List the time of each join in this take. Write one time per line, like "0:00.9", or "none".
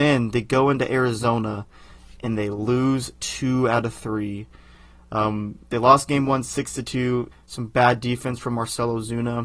0:07.3